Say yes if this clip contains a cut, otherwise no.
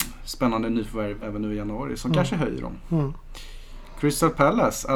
yes